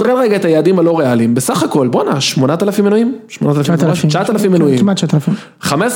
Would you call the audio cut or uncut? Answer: uncut